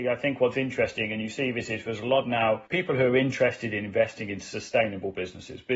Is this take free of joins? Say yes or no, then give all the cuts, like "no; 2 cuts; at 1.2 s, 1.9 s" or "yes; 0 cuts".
yes; 0 cuts